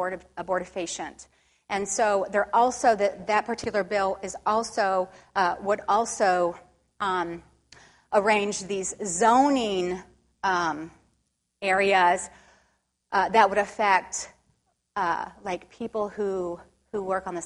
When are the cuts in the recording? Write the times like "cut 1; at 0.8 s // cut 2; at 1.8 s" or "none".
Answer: none

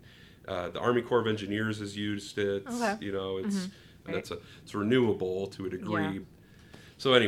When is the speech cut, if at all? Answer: cut 1; at 4.1 s // cut 2; at 6.2 s

